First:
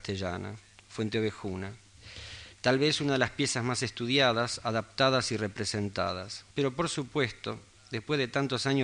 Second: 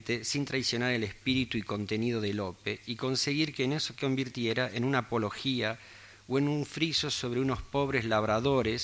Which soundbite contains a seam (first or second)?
first